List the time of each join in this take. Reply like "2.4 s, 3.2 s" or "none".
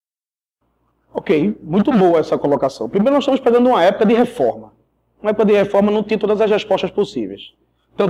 none